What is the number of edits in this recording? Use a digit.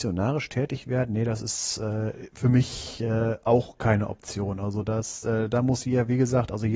0